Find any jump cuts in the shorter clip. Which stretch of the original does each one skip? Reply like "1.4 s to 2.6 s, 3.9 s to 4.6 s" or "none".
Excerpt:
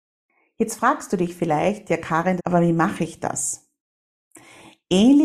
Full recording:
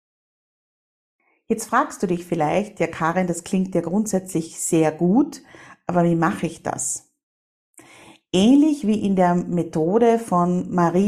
3.3 s to 5.8 s